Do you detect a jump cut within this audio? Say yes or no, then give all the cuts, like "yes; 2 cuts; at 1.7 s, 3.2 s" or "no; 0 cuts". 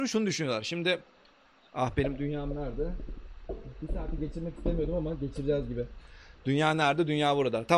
no; 0 cuts